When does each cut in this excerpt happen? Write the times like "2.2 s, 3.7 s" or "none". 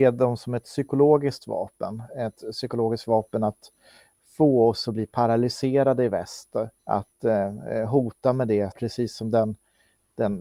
6.8 s, 8.7 s